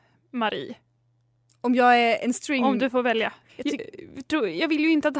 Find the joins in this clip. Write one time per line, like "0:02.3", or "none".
0:03.5